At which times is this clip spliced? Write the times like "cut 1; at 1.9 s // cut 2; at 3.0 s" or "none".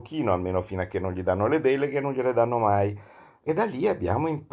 cut 1; at 3.4 s